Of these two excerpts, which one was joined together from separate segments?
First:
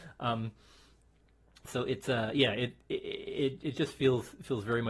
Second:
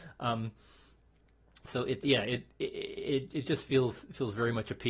second; 1 cut; at 2.0 s

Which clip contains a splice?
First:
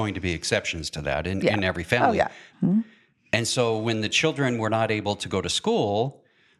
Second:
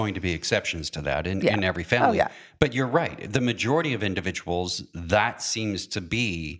first; 1 cut; at 2.5 s

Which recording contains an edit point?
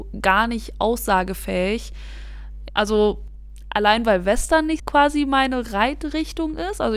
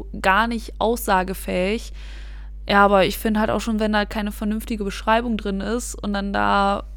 first; 2 cuts; at 2.7 s, 4.8 s

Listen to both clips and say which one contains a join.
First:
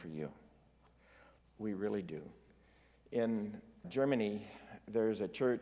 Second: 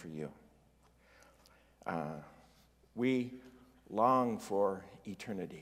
first; 2 cuts; at 1.4 s, 3.8 s

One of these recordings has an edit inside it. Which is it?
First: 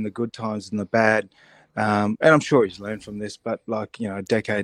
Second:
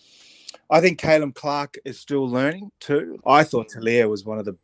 second; 1 cut; at 3.2 s

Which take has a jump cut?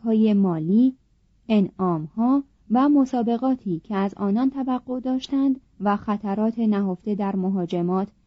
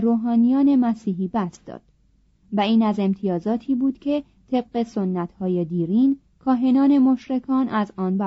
first; 2 cuts; at 1.3 s, 5.7 s

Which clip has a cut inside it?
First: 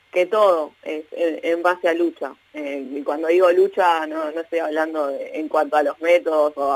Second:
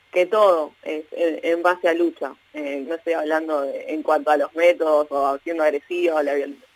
second; 1 cut; at 2.9 s

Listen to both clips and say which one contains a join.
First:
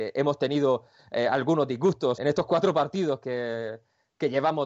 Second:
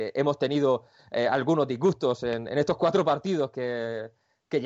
first; 1 cut; at 2.2 s

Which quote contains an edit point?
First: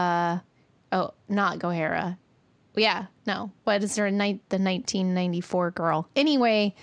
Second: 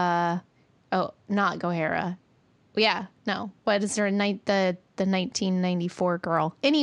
first; 1 cut; at 4.4 s

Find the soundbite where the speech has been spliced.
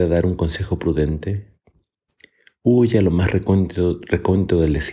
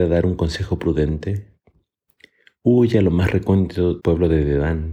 second; 1 cut; at 4.0 s

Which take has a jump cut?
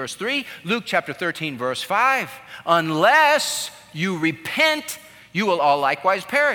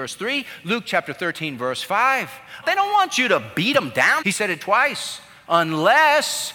second; 3 cuts; at 2.6 s, 4.2 s, 5.4 s

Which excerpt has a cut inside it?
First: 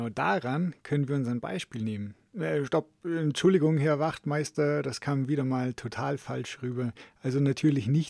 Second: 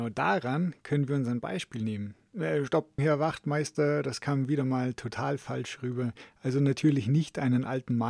second; 1 cut; at 3.0 s

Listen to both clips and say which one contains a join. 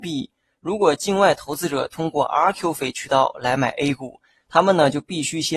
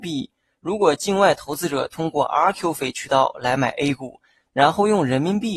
second; 1 cut; at 4.5 s

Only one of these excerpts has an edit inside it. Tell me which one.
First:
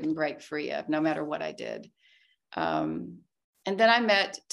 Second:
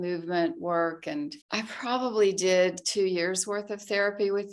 second; 1 cut; at 1.4 s

